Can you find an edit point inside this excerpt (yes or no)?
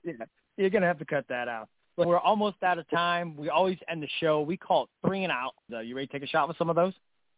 yes